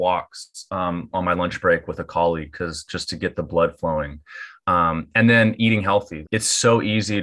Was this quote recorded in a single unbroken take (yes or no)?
no